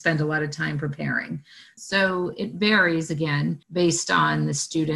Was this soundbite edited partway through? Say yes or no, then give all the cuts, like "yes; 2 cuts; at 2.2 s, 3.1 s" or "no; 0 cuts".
yes; 2 cuts; at 1.8 s, 3.6 s